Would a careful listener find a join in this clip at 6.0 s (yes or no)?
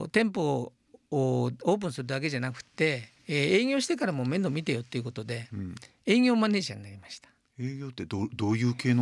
no